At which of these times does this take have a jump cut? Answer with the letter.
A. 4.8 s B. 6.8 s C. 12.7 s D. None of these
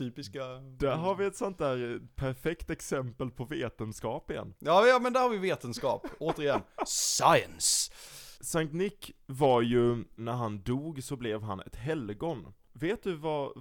D